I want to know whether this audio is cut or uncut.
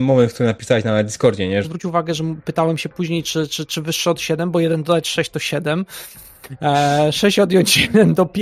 cut